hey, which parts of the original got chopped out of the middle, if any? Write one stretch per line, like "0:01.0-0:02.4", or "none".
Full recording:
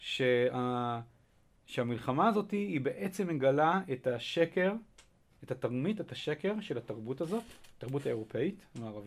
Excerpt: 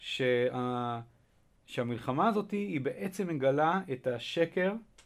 none